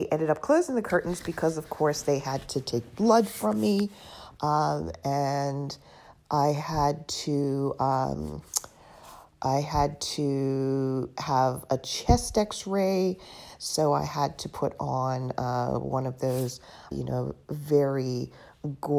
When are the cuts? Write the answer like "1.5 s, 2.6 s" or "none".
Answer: 16.9 s